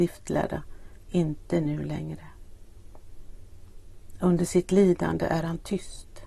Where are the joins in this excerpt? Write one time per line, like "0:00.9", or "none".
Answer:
none